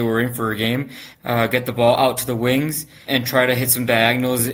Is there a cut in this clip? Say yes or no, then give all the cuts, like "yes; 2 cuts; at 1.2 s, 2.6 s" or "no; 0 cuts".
yes; 2 cuts; at 1.1 s, 3.1 s